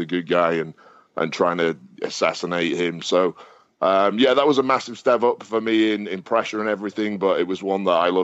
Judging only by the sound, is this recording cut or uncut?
uncut